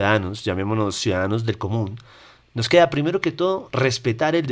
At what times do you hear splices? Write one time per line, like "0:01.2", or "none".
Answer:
none